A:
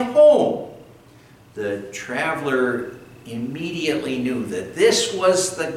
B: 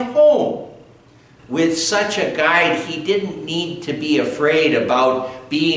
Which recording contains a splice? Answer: B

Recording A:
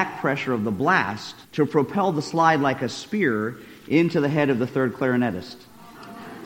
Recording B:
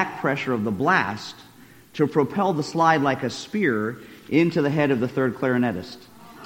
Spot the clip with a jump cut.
A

